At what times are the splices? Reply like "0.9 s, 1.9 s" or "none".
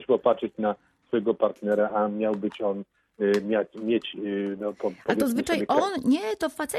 none

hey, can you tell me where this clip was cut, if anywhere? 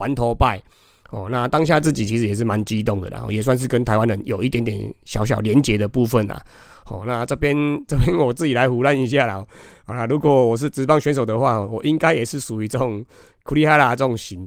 none

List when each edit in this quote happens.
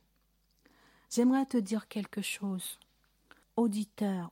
3.4 s

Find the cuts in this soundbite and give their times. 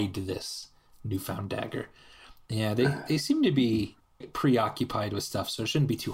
2.5 s, 4.2 s

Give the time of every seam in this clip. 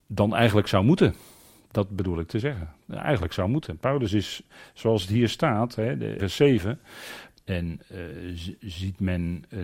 6.2 s, 7.3 s

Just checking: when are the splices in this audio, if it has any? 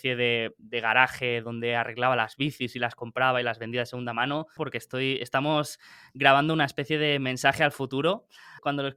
4.6 s

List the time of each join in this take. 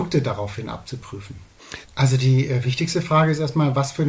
1.8 s

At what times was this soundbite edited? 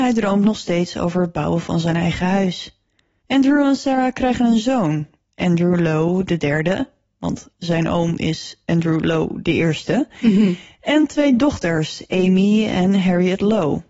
3.2 s

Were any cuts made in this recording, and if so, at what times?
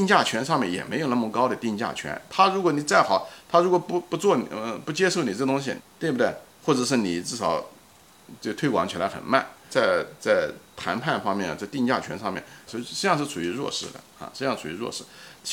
5.8 s, 9.7 s, 12.7 s

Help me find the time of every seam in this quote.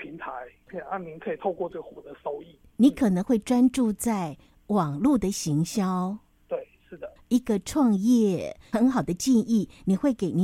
7.2 s

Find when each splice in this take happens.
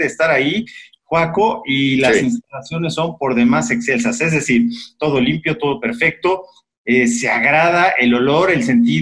none

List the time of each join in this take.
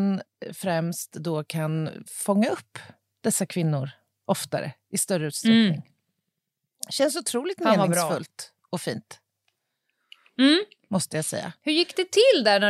none

